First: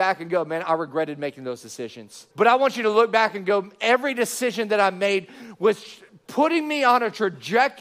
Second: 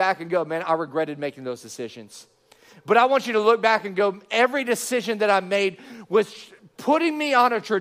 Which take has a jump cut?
first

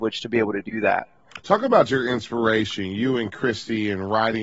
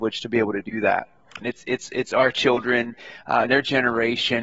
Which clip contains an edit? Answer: second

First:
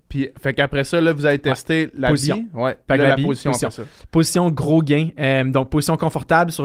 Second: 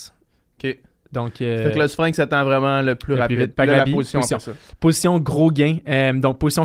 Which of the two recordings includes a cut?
second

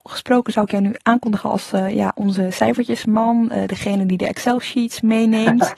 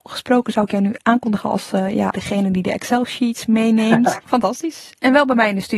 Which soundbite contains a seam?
second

